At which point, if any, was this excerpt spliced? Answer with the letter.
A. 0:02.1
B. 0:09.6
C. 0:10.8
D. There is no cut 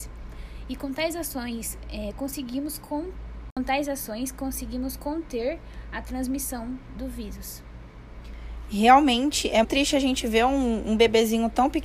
B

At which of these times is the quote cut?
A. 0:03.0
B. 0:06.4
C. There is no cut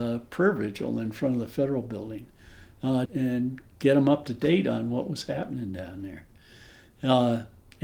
A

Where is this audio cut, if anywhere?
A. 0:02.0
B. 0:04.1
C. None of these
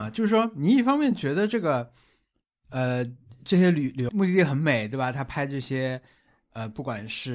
B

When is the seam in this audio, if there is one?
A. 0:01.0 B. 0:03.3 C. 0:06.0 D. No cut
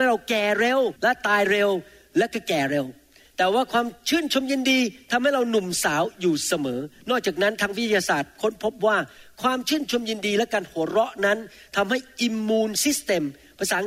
A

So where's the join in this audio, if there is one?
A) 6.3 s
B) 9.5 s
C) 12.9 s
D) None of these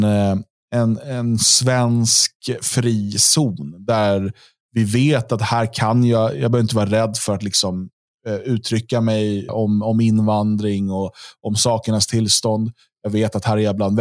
B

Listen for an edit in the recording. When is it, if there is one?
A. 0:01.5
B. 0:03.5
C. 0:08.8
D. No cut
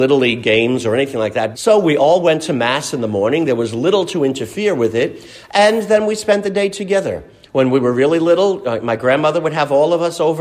A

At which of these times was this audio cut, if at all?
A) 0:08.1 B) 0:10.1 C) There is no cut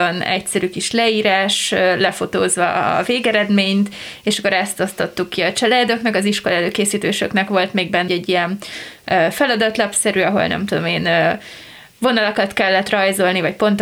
A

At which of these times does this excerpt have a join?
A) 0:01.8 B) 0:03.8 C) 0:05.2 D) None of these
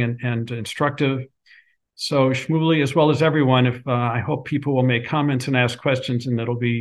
A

